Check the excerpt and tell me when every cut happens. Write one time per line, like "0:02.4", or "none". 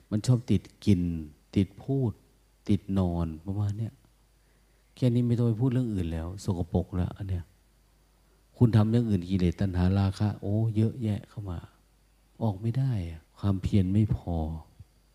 0:13.3